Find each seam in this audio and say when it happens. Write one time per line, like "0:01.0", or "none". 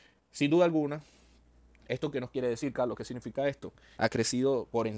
0:04.0